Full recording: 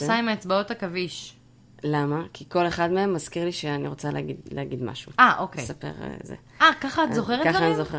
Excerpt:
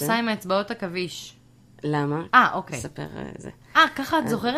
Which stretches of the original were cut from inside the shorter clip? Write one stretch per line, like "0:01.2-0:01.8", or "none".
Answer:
0:02.3-0:05.2